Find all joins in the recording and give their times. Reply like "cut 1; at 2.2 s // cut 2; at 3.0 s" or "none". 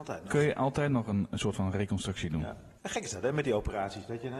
cut 1; at 2.8 s